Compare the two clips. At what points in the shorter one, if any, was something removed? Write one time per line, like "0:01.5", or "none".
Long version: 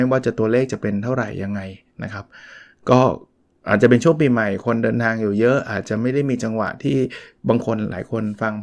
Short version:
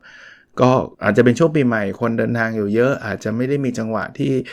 0:00.9

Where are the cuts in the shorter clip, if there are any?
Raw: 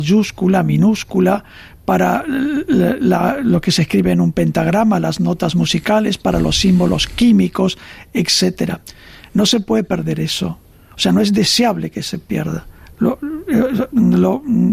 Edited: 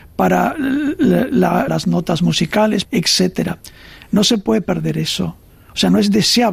0:01.7
0:02.8

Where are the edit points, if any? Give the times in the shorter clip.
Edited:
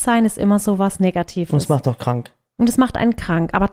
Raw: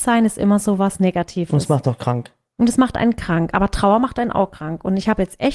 none

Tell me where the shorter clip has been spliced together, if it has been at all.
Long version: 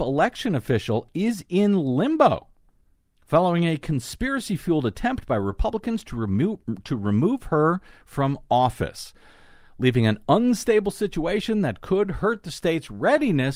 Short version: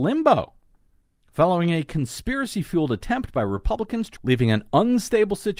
0:04.2

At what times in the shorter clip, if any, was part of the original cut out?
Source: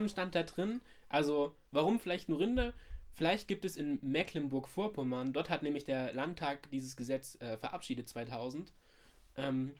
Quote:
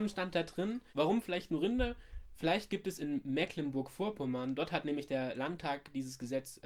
0:00.9

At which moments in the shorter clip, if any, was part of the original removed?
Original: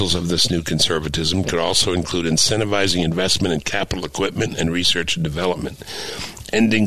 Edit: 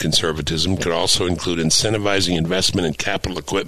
none

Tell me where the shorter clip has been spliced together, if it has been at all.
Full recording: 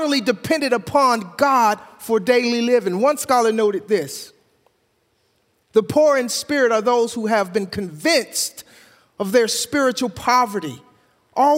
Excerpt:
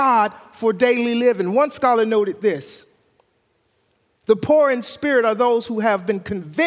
none

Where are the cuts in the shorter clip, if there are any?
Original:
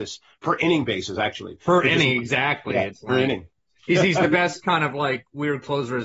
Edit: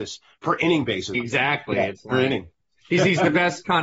0:01.1

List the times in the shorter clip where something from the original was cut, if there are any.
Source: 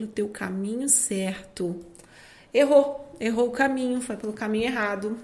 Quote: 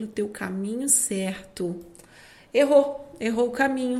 none

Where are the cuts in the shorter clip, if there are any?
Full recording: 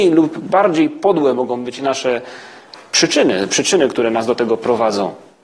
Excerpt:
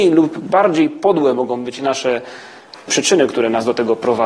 0:02.9

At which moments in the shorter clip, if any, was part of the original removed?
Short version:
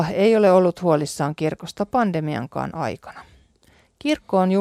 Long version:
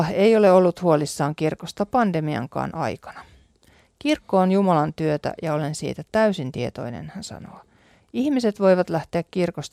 none

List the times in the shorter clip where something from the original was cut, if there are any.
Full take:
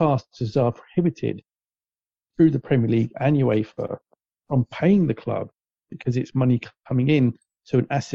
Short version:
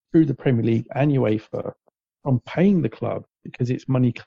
0:03.3

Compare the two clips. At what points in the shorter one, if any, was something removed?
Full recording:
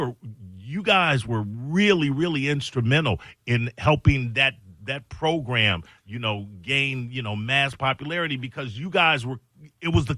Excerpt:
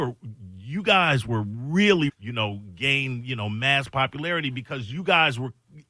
0:02.1

